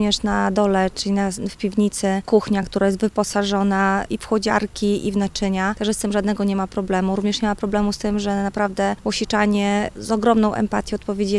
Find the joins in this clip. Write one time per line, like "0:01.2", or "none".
none